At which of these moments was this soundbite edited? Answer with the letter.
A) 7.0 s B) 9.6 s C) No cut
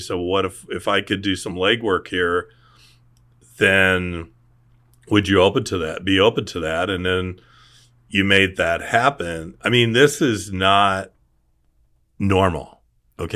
C